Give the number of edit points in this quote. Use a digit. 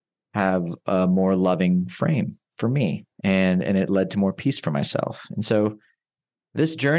1